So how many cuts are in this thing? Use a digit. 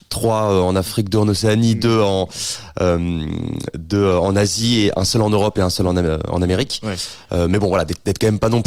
0